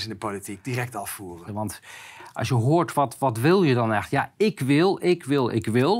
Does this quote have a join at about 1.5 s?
yes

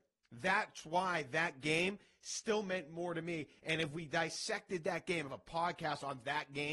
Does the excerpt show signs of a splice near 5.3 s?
yes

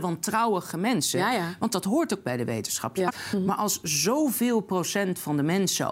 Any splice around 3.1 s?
yes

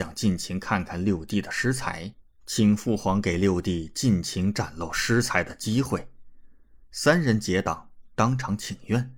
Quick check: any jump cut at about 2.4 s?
yes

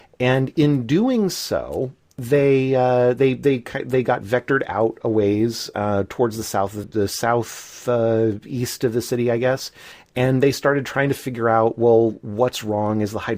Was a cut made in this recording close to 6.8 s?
yes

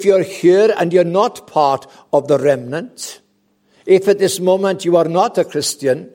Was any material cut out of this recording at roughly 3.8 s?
no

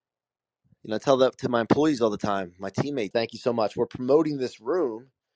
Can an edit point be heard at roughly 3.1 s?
yes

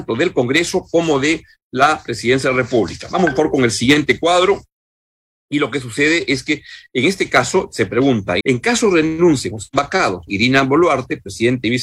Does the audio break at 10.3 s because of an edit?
yes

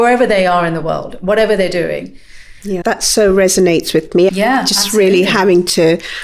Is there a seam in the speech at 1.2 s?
no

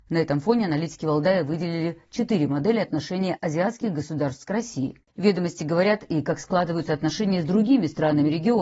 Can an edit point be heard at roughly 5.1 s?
yes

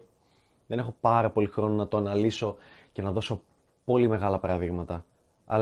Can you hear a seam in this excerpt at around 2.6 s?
no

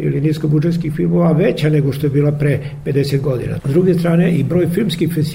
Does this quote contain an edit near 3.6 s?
yes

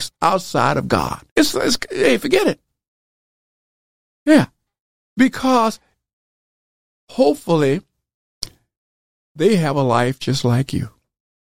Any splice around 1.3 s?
yes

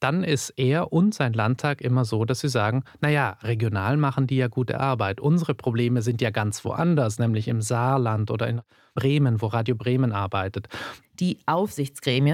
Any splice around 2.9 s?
no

